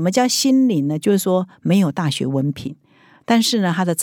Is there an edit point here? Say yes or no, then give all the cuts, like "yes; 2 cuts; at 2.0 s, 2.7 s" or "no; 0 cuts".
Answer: no; 0 cuts